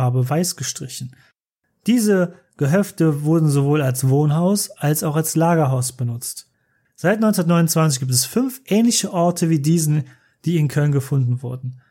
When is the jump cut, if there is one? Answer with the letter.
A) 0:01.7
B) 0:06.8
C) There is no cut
C